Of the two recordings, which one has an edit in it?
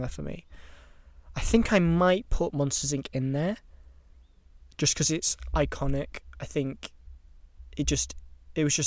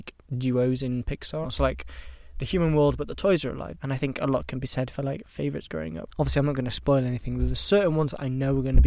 second; 3 cuts; at 1.4 s, 3.8 s, 6.1 s

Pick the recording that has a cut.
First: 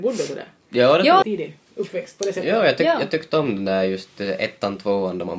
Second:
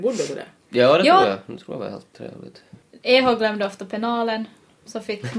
first; 1 cut; at 1.2 s

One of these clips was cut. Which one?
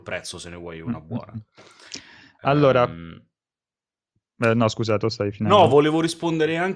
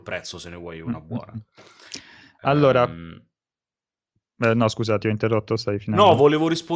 first; 1 cut; at 5.0 s

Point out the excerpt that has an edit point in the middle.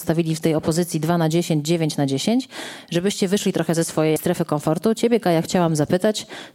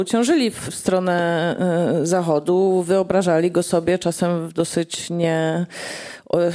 first; 1 cut; at 4.2 s

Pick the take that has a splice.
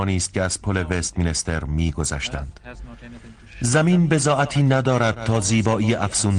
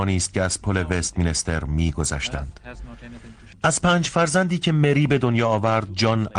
second; 1 cut; at 3.5 s

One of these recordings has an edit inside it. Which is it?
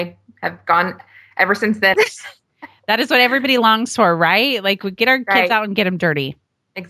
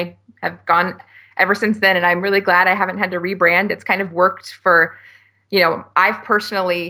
first; 1 cut; at 1.9 s

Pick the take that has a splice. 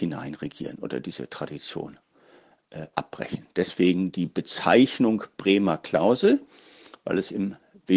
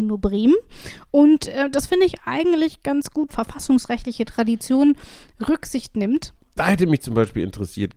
second; 1 cut; at 3.3 s

